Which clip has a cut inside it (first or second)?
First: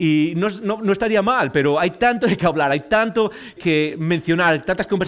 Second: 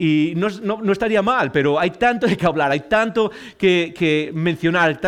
first